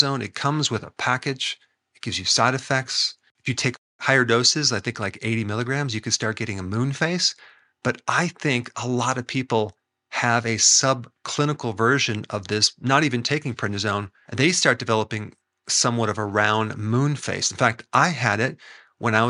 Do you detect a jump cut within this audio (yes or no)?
yes